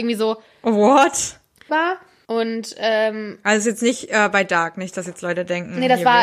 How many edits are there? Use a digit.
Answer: 1